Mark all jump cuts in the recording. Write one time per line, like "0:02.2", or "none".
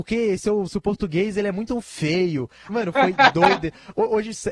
0:02.7